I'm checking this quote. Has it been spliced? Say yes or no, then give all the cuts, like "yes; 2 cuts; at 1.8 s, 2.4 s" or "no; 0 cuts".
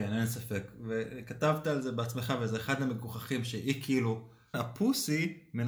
yes; 1 cut; at 4.5 s